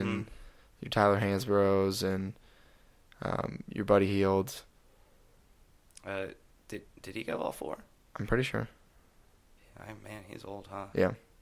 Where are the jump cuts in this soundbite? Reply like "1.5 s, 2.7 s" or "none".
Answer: 5.9 s